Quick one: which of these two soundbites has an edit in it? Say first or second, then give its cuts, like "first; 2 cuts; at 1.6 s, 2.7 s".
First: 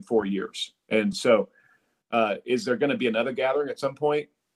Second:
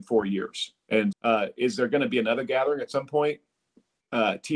second; 1 cut; at 1.1 s